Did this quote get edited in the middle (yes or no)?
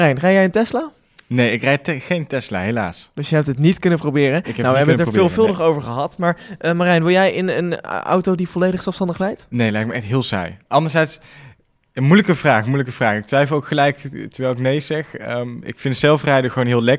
no